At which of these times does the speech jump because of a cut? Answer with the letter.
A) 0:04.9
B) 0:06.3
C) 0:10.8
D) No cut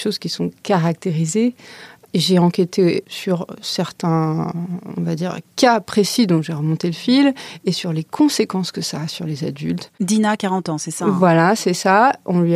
D